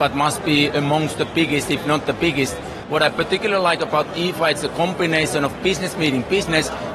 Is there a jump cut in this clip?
yes; 1 cut; at 2.8 s

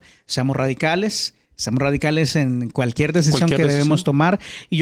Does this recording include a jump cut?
no; 0 cuts

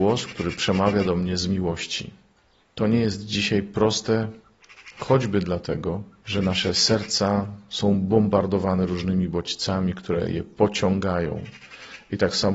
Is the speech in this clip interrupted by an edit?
no; 0 cuts

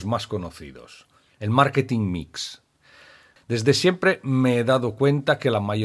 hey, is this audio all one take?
no; 1 cut; at 3.4 s

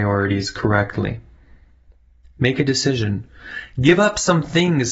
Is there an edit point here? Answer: no; 0 cuts

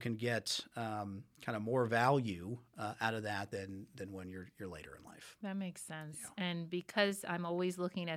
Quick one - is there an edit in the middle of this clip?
no; 0 cuts

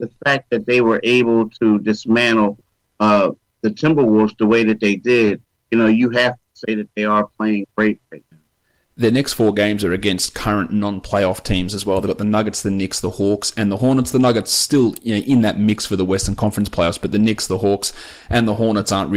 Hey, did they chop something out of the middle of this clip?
no; 0 cuts

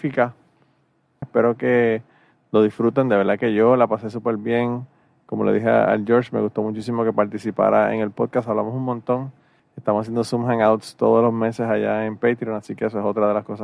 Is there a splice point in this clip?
yes; 1 cut; at 1.2 s

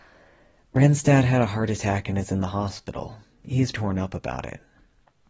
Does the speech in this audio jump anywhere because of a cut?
yes; 1 cut; at 3.7 s

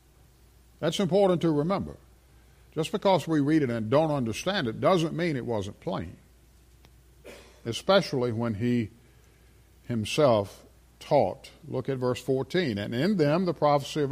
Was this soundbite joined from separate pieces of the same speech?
no; 0 cuts

